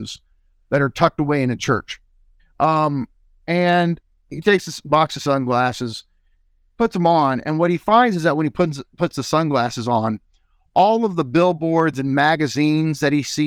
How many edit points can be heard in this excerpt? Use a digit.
1